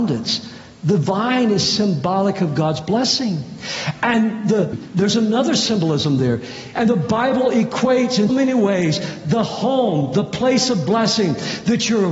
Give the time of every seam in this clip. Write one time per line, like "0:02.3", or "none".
0:04.7
0:06.7
0:08.3